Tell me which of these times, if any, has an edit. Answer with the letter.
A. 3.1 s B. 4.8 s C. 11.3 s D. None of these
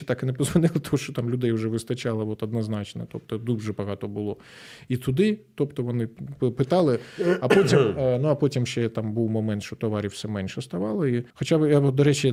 C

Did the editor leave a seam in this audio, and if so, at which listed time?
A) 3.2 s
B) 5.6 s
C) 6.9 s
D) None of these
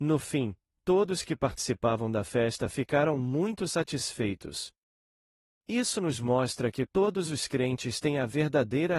C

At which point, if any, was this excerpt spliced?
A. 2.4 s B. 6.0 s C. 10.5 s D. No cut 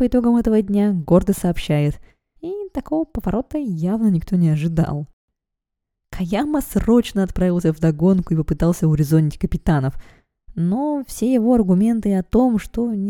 A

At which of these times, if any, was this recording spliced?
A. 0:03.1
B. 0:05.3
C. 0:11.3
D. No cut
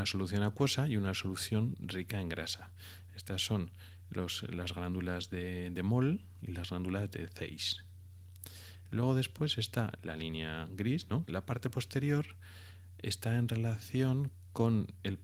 C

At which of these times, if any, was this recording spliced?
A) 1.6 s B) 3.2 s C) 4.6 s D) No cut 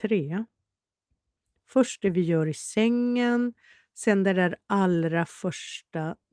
D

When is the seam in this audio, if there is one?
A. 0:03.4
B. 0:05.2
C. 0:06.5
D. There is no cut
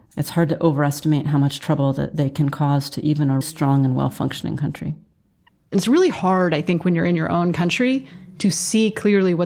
A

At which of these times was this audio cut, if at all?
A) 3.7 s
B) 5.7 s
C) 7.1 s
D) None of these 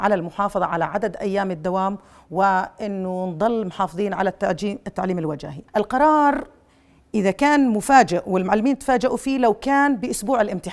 B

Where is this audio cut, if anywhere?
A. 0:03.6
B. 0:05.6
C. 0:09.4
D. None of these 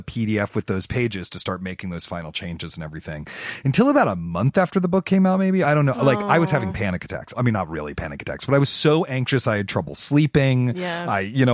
B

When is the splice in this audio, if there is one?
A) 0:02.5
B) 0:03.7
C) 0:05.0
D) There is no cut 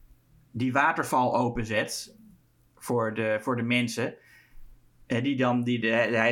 D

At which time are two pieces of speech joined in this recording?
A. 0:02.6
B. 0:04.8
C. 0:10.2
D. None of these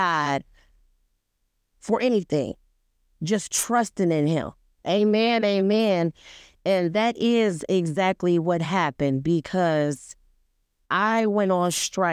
B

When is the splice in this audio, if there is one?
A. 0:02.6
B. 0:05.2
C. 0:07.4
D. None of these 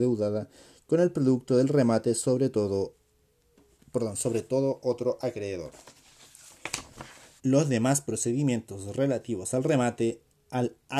C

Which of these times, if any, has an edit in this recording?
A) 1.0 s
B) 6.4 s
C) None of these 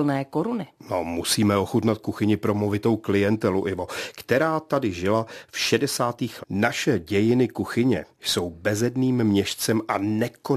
B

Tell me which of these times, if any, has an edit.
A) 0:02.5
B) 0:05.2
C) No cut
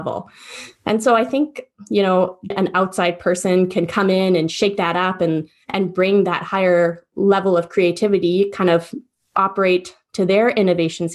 A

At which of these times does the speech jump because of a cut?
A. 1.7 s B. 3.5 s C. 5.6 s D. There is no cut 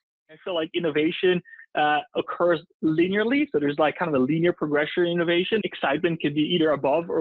C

